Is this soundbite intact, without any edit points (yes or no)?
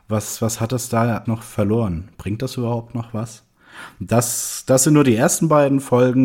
no